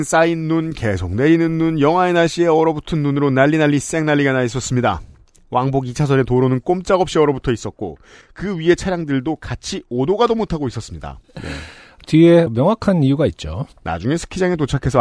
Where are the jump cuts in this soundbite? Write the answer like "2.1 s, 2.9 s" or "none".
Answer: 11.2 s, 13.7 s